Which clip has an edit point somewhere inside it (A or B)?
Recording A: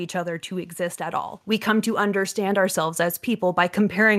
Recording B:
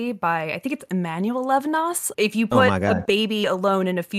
B